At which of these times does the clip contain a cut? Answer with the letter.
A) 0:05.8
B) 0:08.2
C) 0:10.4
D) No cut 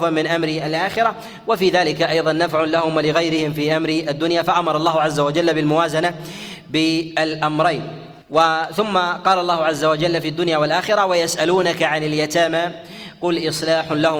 B